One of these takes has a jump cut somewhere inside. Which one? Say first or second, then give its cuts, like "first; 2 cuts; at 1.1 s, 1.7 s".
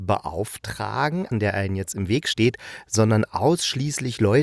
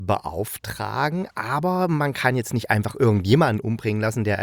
first; 1 cut; at 1.3 s